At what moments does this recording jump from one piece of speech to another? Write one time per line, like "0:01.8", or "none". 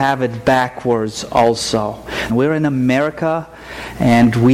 0:02.3